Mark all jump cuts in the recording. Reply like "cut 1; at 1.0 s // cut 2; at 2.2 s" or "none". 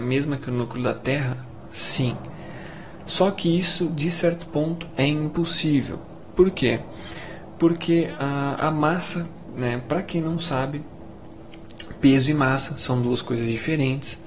none